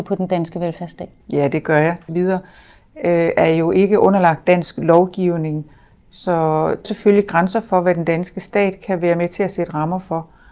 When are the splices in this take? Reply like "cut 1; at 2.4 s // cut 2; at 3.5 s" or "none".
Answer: cut 1; at 2.1 s // cut 2; at 6.8 s